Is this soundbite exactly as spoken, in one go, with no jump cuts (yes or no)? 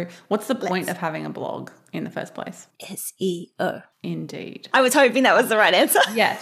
no